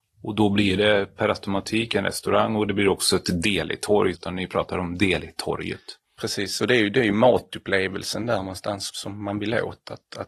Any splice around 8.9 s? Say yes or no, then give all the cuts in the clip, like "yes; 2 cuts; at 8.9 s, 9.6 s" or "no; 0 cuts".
yes; 2 cuts; at 4.1 s, 8.9 s